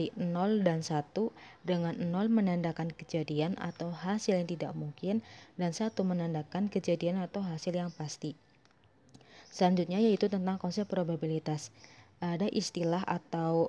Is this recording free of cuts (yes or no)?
yes